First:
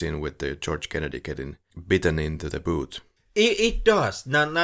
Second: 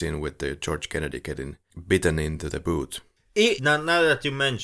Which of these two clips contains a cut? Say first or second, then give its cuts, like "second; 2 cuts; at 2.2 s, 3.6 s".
second; 1 cut; at 3.6 s